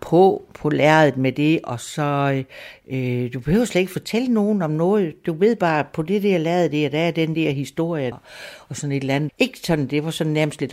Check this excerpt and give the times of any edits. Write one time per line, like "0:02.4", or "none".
0:08.1
0:09.3